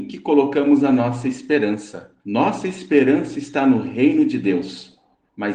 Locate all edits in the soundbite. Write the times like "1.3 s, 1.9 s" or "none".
2.2 s